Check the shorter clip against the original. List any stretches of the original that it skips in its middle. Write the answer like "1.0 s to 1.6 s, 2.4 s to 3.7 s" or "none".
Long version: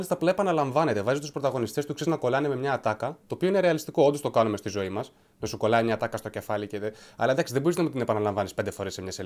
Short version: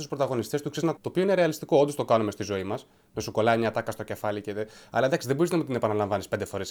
2.2 s to 3.2 s